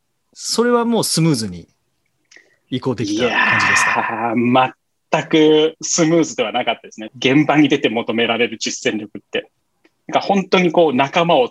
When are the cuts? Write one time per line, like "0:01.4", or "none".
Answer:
0:07.1